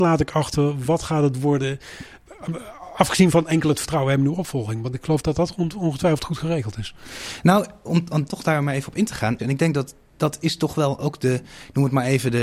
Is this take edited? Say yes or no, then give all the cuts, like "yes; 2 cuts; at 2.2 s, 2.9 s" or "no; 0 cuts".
yes; 1 cut; at 9.4 s